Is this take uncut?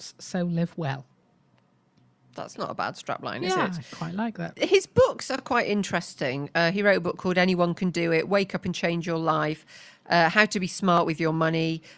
yes; 0 cuts

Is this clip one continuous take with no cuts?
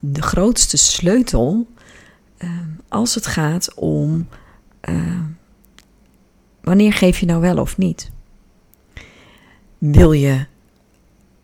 no; 1 cut; at 9.7 s

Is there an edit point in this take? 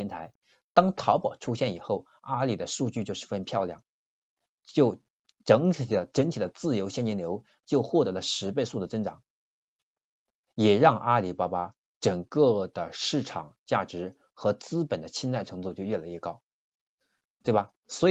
no; 0 cuts

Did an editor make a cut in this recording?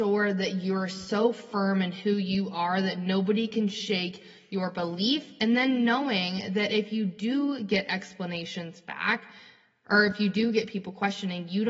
no; 0 cuts

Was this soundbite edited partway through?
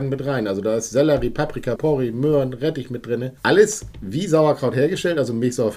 yes; 2 cuts; at 1.8 s, 3.4 s

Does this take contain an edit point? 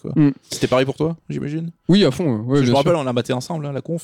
no; 0 cuts

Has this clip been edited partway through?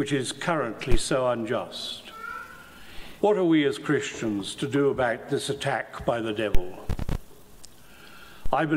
yes; 1 cut; at 3.2 s

